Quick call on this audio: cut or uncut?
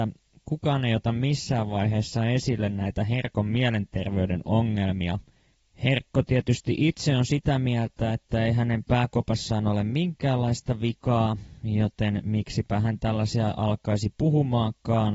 uncut